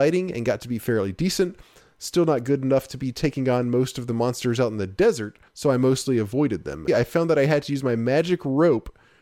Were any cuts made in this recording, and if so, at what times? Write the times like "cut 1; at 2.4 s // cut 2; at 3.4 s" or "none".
cut 1; at 5.5 s // cut 2; at 6.9 s